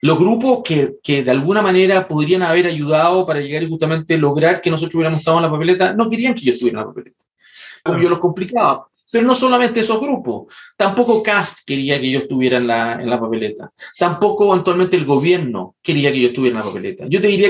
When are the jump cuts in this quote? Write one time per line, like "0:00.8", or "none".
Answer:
0:07.9